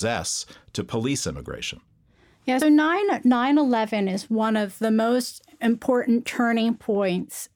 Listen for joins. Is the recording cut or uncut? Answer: cut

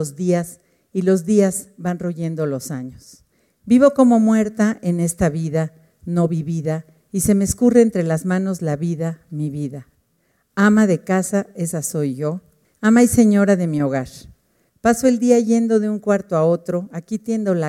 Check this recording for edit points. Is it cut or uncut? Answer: uncut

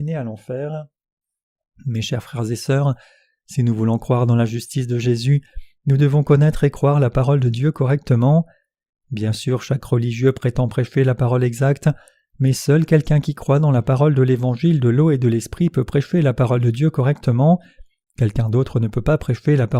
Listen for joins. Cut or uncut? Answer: uncut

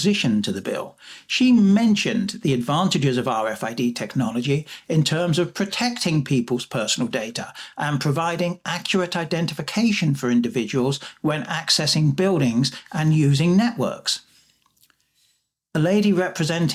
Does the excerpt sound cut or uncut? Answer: uncut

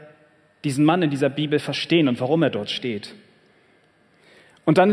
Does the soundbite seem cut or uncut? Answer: uncut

